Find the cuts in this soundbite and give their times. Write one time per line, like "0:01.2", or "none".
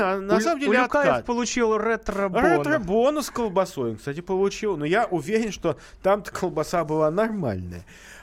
none